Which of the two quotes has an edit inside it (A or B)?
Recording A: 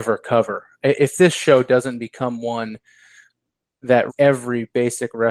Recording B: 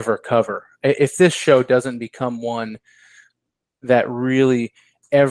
A